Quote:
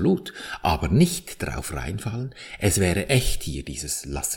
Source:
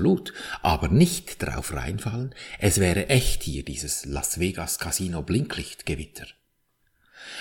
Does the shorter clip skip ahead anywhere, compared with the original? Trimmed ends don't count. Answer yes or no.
no